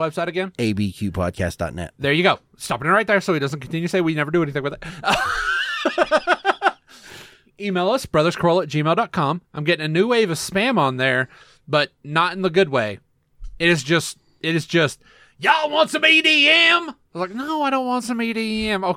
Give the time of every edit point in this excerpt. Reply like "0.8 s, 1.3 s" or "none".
none